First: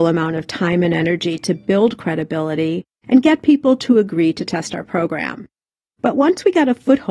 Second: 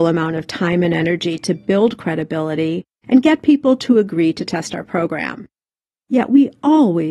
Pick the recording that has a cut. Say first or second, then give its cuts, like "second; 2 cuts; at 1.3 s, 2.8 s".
second; 1 cut; at 5.9 s